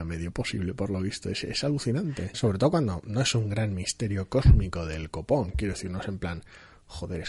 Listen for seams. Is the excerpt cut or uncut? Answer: cut